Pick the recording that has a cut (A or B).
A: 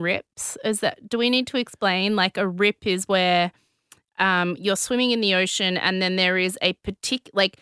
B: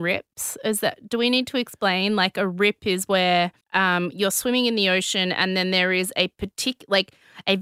B